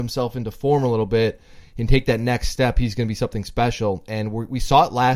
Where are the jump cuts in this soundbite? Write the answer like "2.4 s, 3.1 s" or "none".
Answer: none